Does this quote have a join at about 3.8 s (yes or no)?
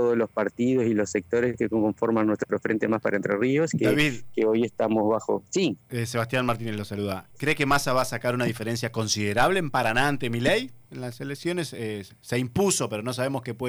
no